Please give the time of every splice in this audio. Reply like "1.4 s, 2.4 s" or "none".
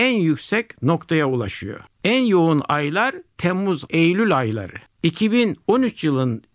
3.9 s